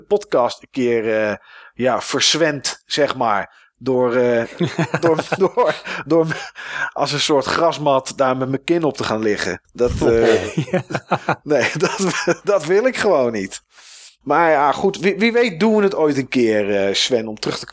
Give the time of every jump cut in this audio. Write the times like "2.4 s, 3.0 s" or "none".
9.6 s, 14.2 s